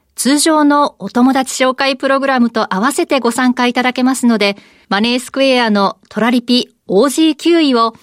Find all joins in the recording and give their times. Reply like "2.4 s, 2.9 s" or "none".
4.8 s